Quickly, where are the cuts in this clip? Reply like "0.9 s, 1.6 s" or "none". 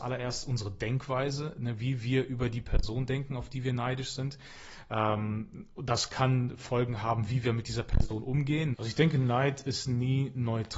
8.7 s